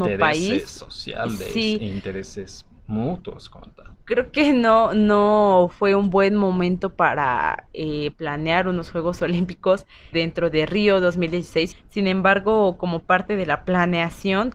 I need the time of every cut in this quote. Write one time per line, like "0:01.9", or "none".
0:10.1
0:11.7